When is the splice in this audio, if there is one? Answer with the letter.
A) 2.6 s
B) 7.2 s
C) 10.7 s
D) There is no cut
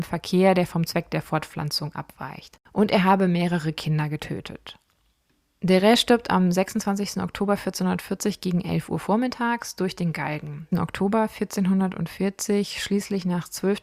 C